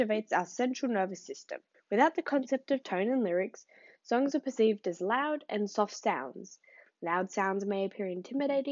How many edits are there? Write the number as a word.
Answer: one